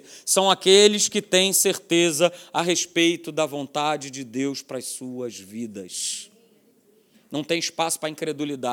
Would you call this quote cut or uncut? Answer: uncut